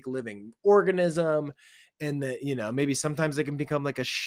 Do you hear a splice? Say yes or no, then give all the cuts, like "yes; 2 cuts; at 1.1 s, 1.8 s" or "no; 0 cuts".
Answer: no; 0 cuts